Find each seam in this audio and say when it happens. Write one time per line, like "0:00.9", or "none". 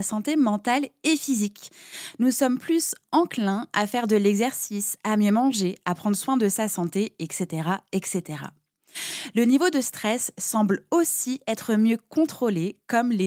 none

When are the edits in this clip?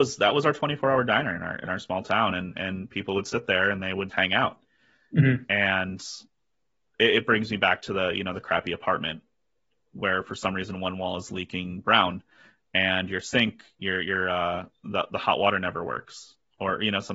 0:04.1

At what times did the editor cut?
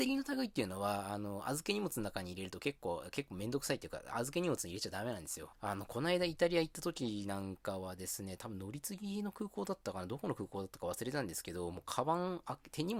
0:05.5

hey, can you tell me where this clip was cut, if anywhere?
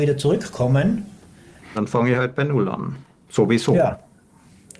0:01.7

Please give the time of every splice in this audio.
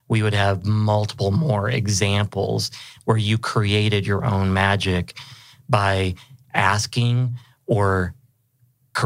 none

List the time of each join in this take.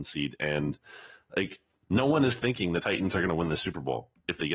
none

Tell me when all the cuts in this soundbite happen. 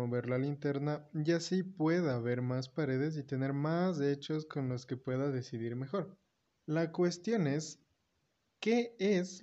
none

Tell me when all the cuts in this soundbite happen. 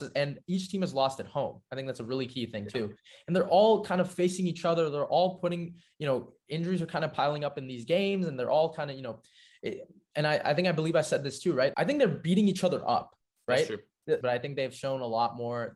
0:11.7
0:14.2

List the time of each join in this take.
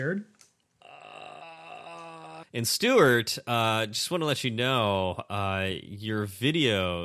0:02.4

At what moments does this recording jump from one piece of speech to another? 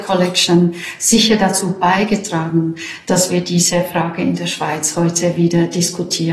none

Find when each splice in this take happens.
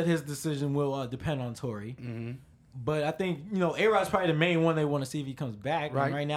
none

